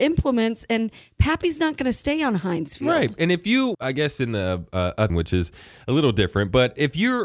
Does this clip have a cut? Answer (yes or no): yes